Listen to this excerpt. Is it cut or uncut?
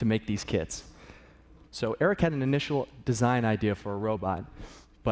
cut